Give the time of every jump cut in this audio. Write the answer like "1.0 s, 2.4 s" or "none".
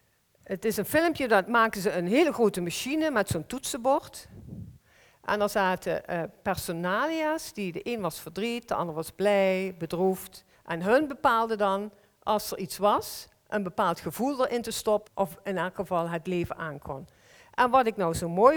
10.5 s, 15.1 s